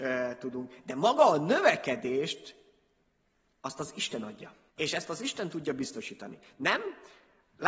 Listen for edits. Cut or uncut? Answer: cut